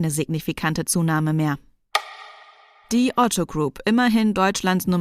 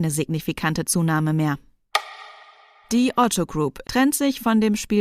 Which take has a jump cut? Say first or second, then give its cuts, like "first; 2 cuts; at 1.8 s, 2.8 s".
second; 1 cut; at 3.8 s